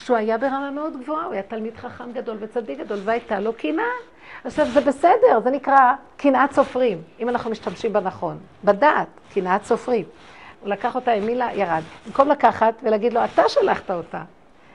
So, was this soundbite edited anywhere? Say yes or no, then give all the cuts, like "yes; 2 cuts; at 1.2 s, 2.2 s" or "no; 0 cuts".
yes; 2 cuts; at 6.1 s, 10.5 s